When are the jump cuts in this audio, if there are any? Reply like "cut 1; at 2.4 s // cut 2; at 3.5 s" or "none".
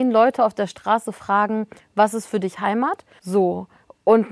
cut 1; at 3.2 s

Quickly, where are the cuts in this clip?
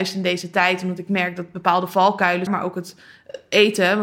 cut 1; at 2.5 s

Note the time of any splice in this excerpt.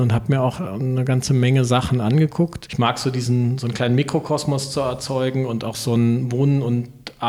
cut 1; at 2.7 s

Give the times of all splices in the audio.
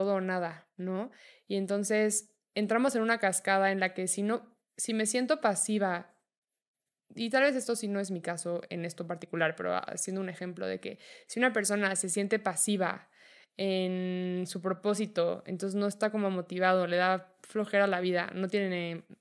none

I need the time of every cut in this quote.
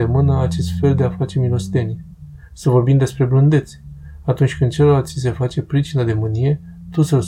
none

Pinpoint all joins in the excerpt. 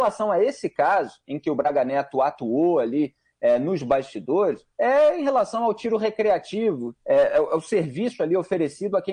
cut 1; at 4.7 s // cut 2; at 7.0 s

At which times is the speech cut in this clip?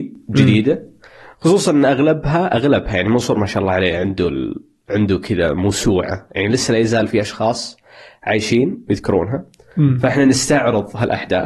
cut 1; at 6.3 s

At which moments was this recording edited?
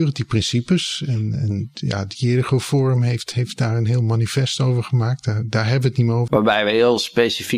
cut 1; at 6.3 s

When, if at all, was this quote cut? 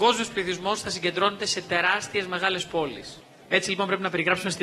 cut 1; at 3.4 s

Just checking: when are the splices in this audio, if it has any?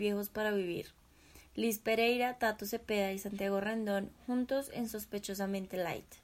none

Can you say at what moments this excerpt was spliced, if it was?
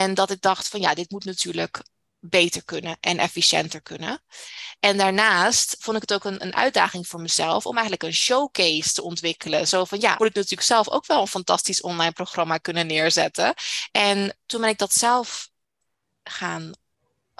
cut 1; at 10.2 s // cut 2; at 13.9 s

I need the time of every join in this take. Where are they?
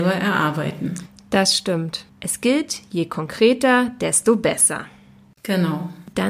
cut 1; at 2.1 s

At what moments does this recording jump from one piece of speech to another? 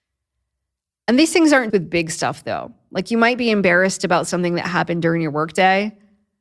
cut 1; at 1.7 s

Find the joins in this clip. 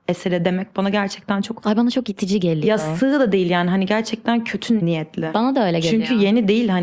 none

